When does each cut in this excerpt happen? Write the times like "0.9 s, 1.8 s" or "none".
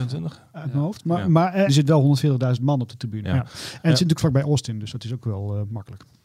1.7 s, 3.2 s

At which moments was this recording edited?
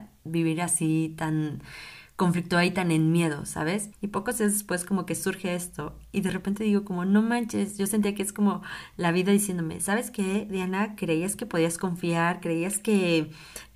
3.9 s

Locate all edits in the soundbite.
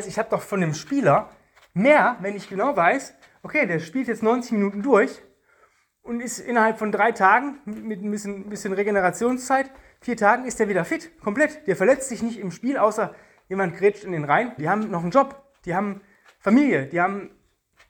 14.6 s

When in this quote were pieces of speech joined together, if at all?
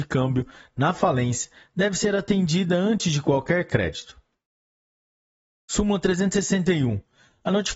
none

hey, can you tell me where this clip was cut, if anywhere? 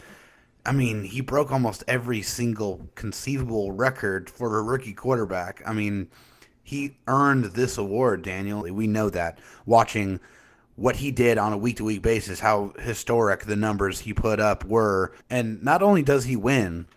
8.6 s, 15.2 s

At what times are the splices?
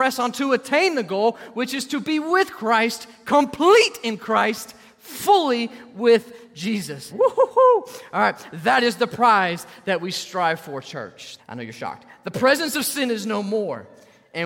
7.1 s, 11.4 s

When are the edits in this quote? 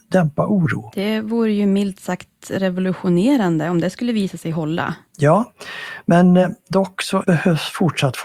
none

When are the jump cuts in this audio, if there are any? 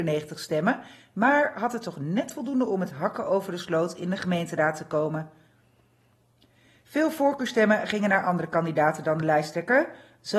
none

